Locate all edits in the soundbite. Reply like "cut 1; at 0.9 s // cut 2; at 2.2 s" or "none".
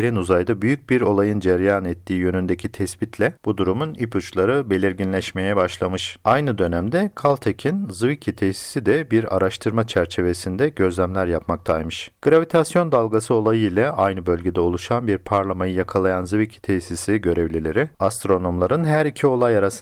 none